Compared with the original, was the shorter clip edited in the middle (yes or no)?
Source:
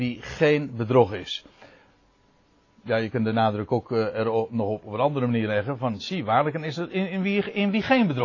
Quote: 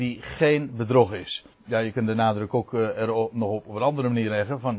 yes